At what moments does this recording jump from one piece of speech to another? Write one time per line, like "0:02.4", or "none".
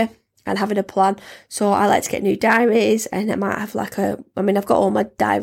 none